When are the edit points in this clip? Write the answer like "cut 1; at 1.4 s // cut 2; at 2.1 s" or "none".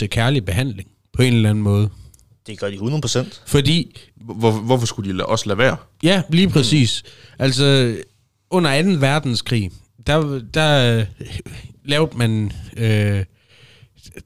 none